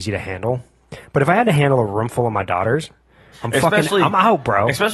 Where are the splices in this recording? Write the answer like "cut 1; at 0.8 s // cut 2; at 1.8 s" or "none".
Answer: cut 1; at 3.3 s